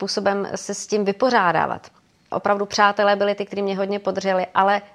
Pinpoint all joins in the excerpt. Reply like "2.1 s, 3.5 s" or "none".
2.3 s

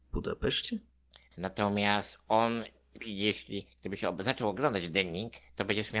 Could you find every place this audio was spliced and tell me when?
1.3 s

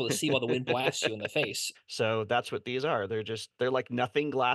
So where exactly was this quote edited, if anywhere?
1.7 s

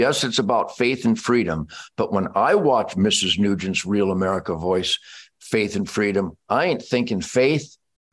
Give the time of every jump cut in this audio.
none

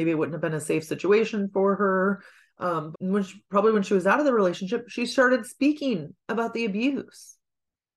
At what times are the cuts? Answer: 2.9 s

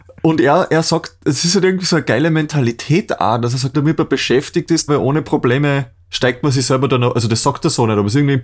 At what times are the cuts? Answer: 3.7 s, 4.9 s

